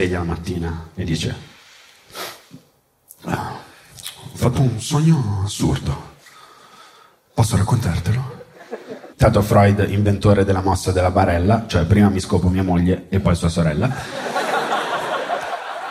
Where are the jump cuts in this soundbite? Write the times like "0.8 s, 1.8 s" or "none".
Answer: 9.1 s